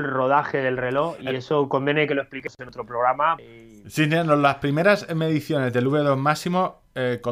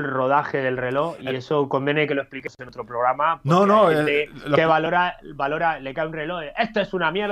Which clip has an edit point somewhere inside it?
first; 1 cut; at 3.4 s

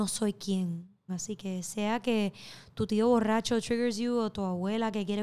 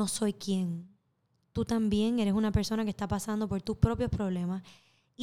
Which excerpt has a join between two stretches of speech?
first; 1 cut; at 1.1 s

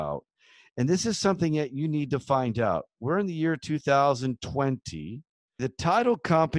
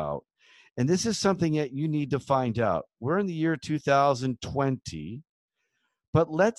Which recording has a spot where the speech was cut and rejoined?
first; 1 cut; at 5.6 s

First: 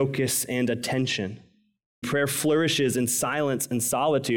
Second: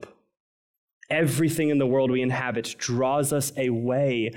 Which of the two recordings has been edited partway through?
first; 1 cut; at 2.0 s

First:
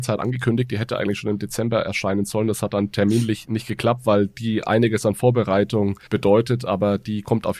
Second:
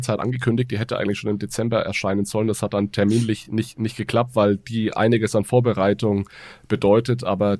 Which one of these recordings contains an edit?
first; 2 cuts; at 3.4 s, 6.1 s

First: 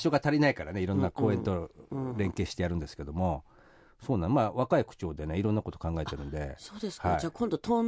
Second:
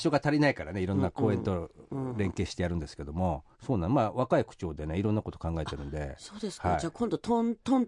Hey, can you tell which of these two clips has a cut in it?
second; 1 cut; at 3.5 s

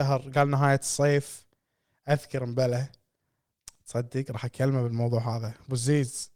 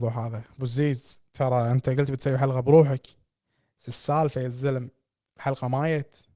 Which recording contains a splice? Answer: second; 1 cut; at 1.3 s

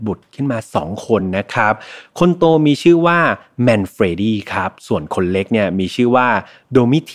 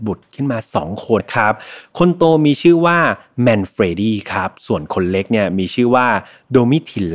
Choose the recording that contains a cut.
second; 1 cut; at 1.2 s

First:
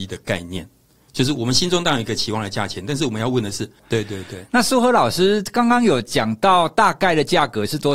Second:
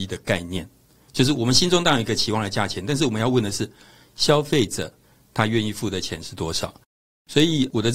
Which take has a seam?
first; 1 cut; at 3.8 s

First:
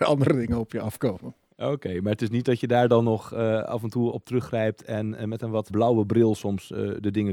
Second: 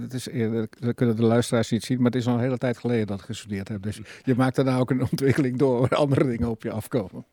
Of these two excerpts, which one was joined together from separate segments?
first; 2 cuts; at 4.1 s, 5.7 s

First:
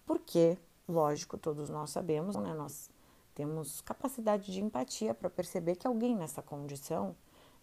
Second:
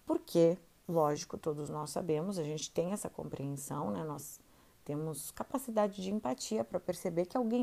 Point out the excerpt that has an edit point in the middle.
first; 1 cut; at 2.3 s

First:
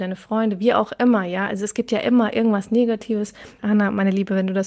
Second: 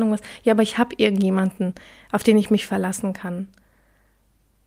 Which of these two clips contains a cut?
first; 1 cut; at 3.6 s

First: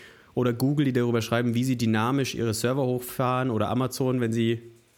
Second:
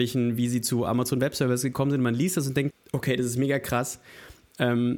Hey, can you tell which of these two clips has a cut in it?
second; 1 cut; at 2.7 s

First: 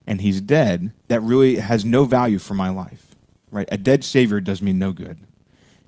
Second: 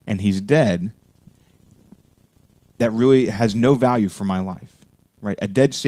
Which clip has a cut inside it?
first; 1 cut; at 1.0 s

